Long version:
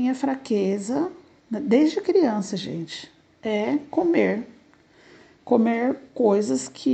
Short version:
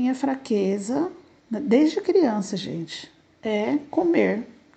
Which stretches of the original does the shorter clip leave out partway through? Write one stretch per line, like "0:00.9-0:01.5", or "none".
none

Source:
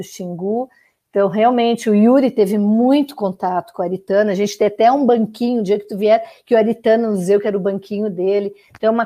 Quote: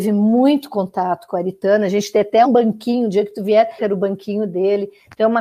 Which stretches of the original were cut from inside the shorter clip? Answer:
0:04.9-0:05.0
0:06.3-0:07.4

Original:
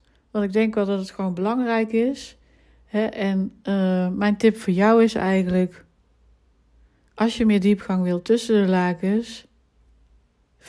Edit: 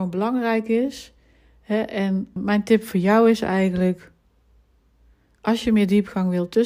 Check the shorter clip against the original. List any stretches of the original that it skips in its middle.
0:03.6-0:04.1

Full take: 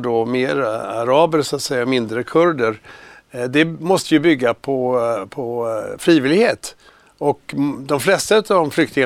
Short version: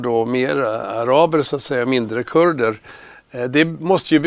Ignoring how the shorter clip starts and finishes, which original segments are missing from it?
none

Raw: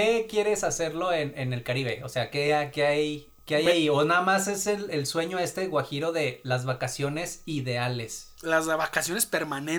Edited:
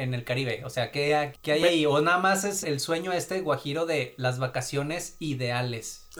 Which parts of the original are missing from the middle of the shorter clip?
0:02.7-0:03.4
0:04.6-0:04.9

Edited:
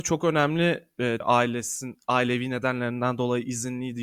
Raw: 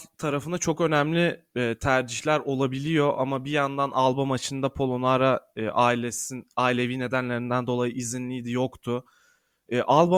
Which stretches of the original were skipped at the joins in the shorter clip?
0:01.8-0:05.7

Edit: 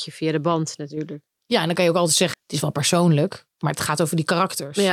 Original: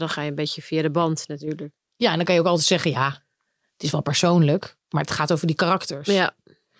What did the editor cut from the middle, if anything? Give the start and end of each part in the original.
0:02.8-0:03.6

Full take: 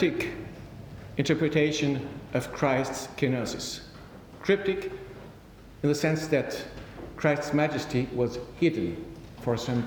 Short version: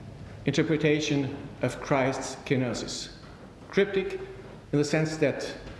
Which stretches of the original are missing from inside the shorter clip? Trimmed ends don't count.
0:05.4-0:05.7

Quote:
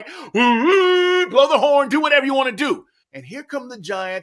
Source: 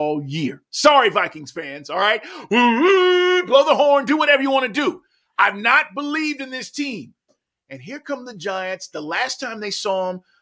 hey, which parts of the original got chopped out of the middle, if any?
0:05.2-0:07.6

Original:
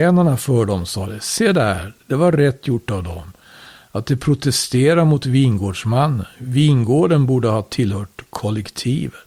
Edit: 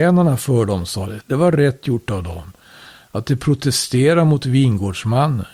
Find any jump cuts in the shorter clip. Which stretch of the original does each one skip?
0:01.2-0:02.0

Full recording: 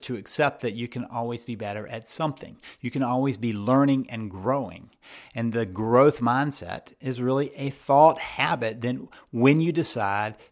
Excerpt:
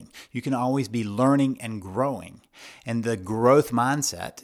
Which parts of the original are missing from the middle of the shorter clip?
none

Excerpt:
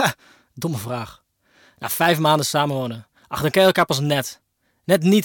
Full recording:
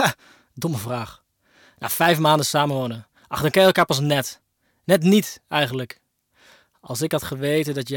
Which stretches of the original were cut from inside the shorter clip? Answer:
none

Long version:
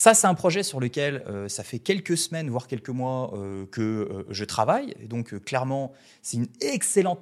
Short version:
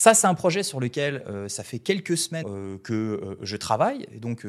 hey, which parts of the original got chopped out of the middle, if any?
0:02.4-0:03.3

